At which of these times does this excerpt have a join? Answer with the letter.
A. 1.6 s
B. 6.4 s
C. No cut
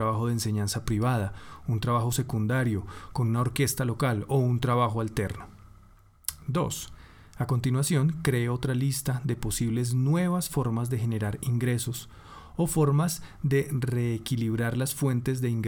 C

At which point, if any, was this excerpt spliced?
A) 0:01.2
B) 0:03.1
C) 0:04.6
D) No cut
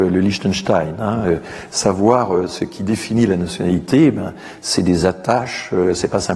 D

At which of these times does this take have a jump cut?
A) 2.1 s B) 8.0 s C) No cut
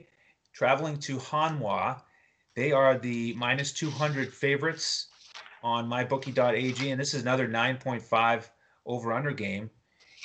C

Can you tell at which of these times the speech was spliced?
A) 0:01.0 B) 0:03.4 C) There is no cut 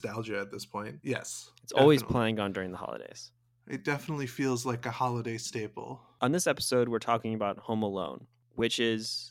A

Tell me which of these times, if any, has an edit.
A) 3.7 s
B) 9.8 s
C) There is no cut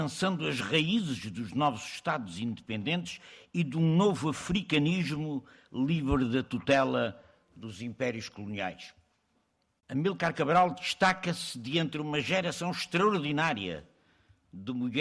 B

